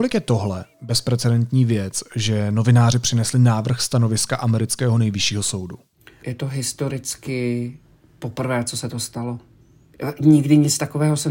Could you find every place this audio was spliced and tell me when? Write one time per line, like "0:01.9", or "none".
0:06.2